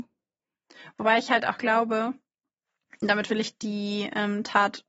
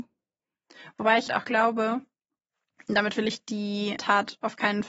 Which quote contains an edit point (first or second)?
second